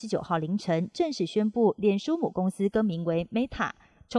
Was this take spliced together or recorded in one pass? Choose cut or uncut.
uncut